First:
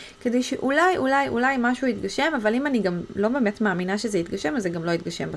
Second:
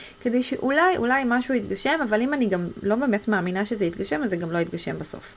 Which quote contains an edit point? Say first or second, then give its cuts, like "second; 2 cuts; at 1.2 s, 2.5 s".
second; 1 cut; at 1.0 s